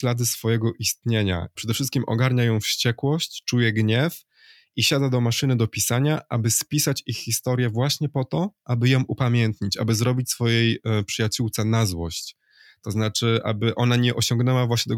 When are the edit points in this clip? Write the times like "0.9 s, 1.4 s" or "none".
1.6 s